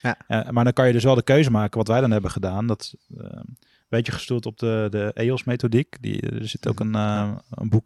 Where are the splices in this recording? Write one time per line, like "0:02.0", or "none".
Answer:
none